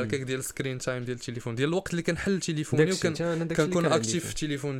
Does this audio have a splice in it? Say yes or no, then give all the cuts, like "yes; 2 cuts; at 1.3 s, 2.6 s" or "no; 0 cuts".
no; 0 cuts